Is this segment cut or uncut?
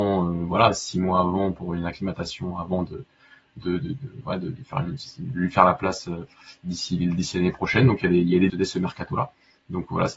cut